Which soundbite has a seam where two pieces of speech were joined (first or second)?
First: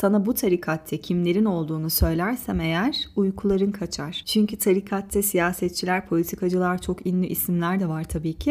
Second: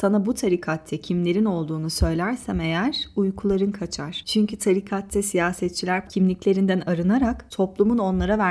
second